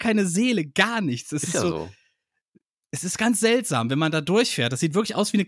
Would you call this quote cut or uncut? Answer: uncut